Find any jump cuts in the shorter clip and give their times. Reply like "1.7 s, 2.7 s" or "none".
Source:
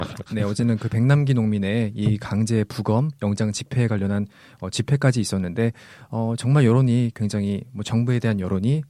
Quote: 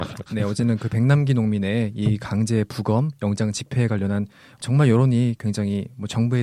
4.6 s